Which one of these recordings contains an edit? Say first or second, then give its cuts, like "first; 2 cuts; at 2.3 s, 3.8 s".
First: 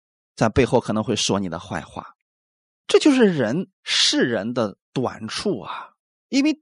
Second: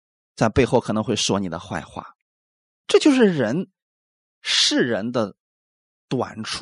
first; 2 cuts; at 3.7 s, 4.8 s